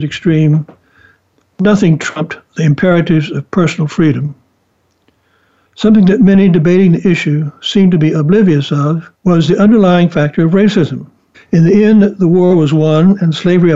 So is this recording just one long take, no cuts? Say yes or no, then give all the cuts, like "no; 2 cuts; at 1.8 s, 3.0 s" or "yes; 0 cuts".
no; 3 cuts; at 5.7 s, 9.1 s, 11.3 s